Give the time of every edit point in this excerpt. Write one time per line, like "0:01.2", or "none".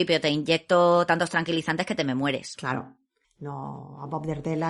0:03.2